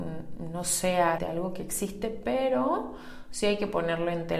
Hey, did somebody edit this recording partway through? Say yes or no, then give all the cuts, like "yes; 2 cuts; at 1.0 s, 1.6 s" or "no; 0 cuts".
yes; 1 cut; at 1.2 s